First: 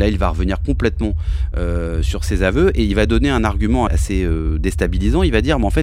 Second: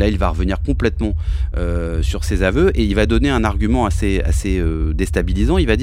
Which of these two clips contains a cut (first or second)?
first